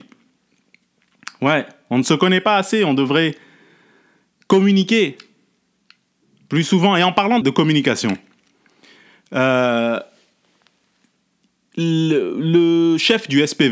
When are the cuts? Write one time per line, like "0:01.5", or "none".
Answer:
0:07.4